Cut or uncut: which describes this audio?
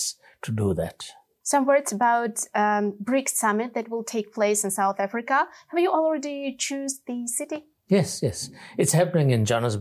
uncut